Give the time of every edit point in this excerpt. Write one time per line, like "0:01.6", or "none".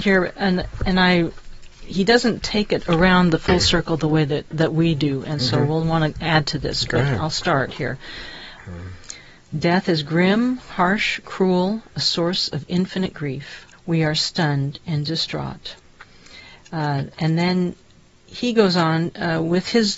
0:08.6
0:13.7